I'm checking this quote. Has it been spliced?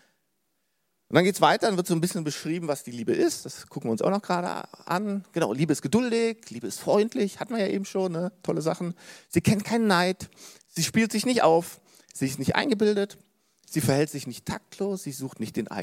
no; 0 cuts

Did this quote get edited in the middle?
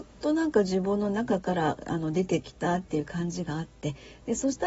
no; 0 cuts

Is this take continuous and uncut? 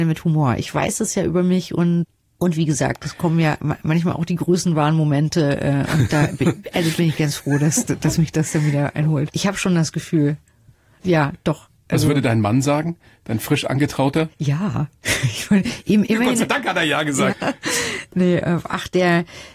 no; 3 cuts; at 9.3 s, 16.1 s, 17.3 s

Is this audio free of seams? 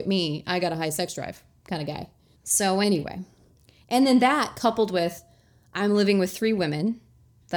no; 1 cut; at 2.4 s

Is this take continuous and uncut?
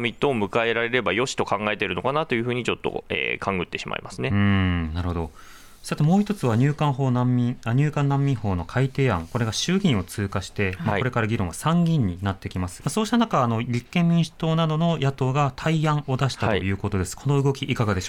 no; 1 cut; at 12.8 s

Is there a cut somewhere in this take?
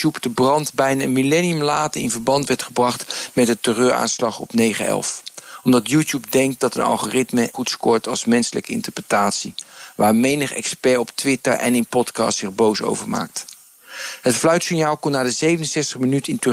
yes; 1 cut; at 7.5 s

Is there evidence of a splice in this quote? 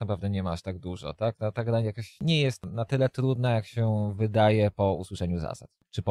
no; 0 cuts

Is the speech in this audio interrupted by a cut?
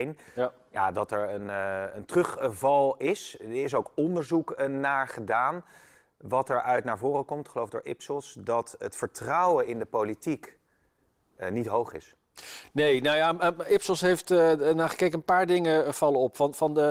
no; 0 cuts

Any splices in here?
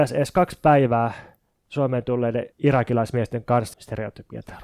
yes; 2 cuts; at 2.5 s, 3.7 s

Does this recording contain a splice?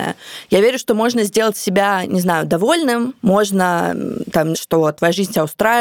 yes; 2 cuts; at 3.2 s, 4.5 s

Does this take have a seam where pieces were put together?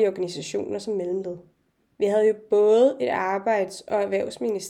yes; 1 cut; at 2.0 s

